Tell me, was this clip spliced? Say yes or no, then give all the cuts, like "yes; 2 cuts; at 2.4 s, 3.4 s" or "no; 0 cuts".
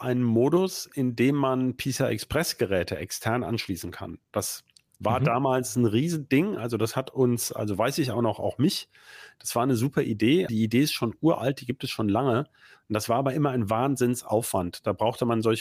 yes; 1 cut; at 10.5 s